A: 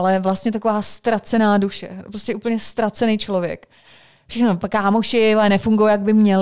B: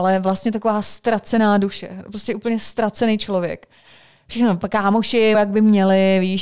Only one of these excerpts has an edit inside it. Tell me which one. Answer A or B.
B